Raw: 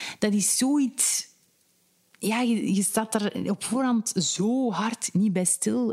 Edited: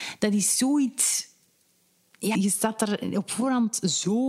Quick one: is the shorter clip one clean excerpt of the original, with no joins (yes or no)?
no